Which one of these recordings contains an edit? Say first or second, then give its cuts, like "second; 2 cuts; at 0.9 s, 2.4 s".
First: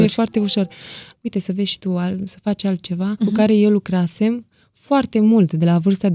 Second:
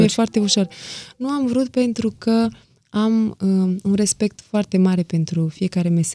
first; 2 cuts; at 1.1 s, 3.2 s